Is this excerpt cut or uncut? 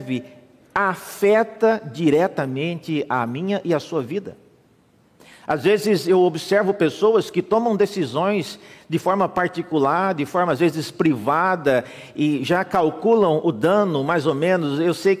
uncut